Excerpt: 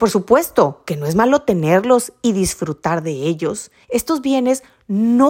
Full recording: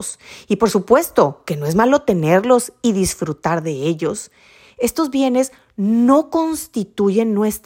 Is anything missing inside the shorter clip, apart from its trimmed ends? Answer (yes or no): yes